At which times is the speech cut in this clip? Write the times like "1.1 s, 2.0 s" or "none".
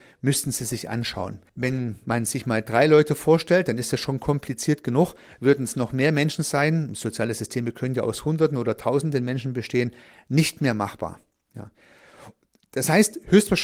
1.5 s